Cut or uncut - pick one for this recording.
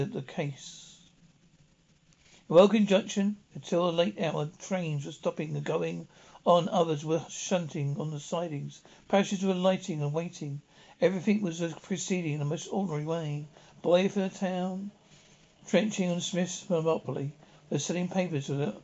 uncut